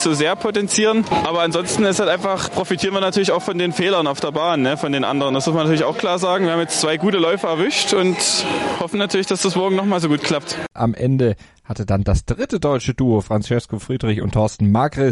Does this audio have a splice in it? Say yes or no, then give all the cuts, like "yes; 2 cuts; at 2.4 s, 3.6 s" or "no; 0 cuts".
yes; 1 cut; at 10.8 s